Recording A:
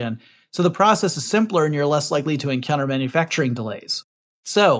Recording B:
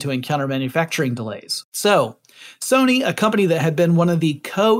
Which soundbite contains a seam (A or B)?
B